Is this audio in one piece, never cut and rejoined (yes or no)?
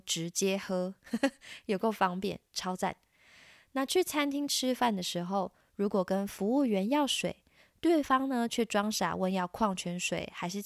yes